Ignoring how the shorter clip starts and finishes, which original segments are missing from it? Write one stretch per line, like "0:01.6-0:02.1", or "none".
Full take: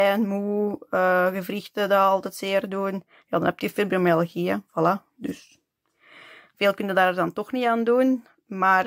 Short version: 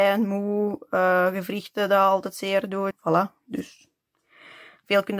0:02.9-0:04.6